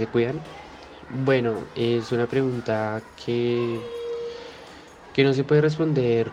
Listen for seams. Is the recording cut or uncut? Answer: uncut